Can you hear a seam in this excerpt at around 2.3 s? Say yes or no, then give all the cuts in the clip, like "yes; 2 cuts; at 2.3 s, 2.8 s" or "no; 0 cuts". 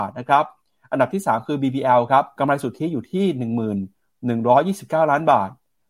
yes; 1 cut; at 2.3 s